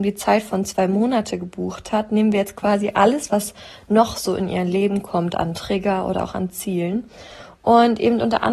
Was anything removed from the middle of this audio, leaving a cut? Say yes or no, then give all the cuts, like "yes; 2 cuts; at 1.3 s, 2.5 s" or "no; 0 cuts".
no; 0 cuts